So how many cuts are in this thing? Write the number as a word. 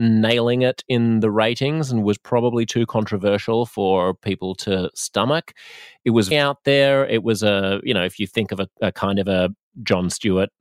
one